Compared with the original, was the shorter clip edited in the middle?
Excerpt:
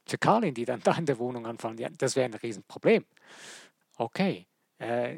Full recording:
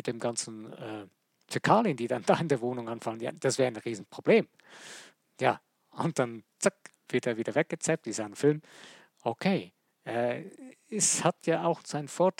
yes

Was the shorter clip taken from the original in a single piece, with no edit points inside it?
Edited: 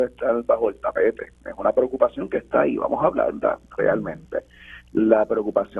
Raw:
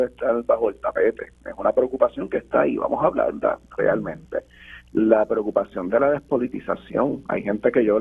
yes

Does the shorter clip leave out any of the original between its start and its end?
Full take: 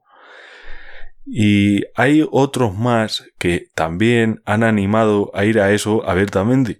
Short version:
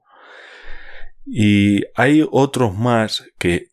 no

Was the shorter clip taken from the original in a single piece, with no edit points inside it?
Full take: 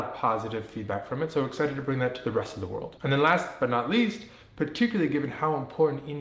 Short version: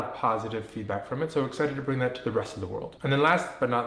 yes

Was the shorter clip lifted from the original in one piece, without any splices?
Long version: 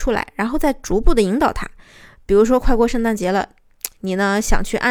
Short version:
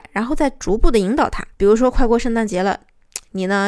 no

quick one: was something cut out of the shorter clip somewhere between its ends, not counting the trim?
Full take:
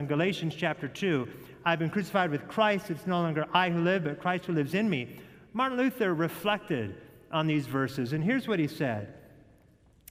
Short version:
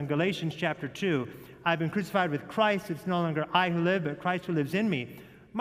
no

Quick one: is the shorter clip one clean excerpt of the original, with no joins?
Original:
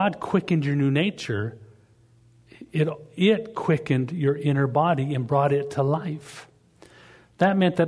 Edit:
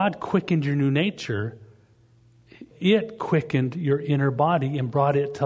no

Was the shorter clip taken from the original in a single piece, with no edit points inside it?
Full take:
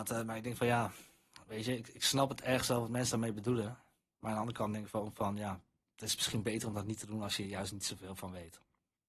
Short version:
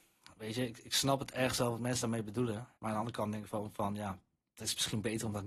no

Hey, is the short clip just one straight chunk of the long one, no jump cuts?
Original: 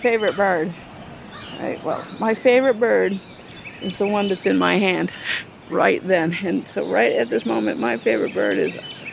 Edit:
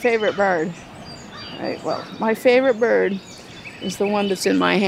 yes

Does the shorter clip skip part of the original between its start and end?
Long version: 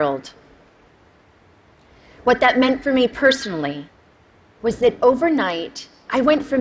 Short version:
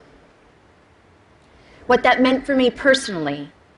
no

